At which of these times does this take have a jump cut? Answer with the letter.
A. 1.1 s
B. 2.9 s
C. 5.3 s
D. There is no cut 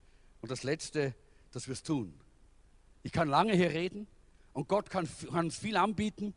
D